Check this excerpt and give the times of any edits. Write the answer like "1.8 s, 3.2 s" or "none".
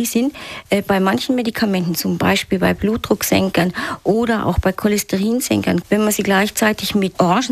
5.8 s